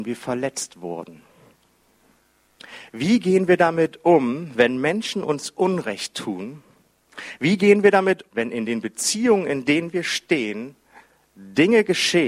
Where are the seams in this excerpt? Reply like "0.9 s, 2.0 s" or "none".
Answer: 8.3 s